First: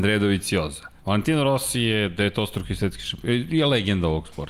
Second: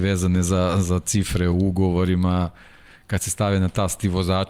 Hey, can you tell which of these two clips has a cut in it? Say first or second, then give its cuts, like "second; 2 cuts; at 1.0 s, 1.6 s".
first; 1 cut; at 1.0 s